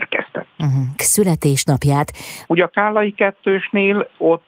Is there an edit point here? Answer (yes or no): yes